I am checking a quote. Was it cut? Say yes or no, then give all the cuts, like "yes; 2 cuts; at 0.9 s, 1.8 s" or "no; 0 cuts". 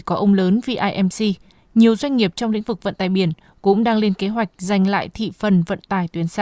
no; 0 cuts